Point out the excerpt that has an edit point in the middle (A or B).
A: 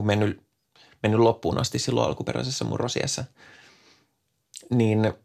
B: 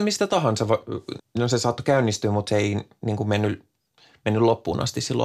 B